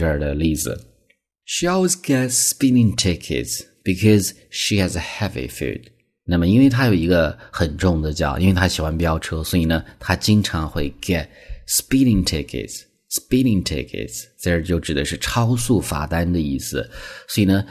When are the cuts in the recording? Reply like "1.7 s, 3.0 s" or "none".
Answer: none